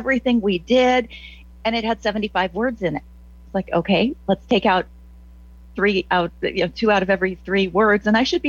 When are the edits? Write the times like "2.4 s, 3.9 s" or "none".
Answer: none